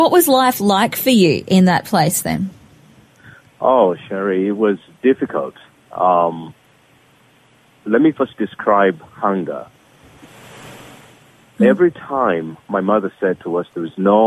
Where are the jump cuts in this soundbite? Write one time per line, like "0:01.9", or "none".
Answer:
none